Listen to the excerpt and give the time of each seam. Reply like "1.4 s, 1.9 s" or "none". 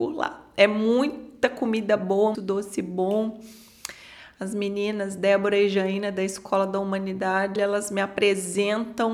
2.3 s, 7.6 s